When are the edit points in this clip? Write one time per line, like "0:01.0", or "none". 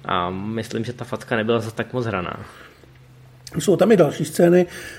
none